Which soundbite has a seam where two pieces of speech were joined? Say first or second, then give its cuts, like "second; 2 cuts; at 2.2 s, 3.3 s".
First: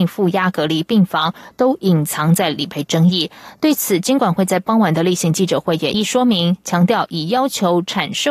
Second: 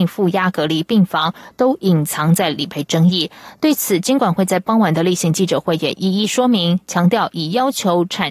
first; 1 cut; at 5.9 s